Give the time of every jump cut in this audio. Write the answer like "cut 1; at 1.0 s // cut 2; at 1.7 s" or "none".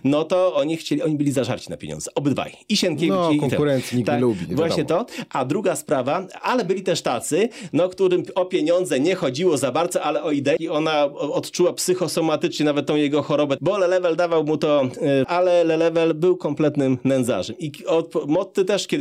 cut 1; at 10.6 s // cut 2; at 13.6 s // cut 3; at 15.2 s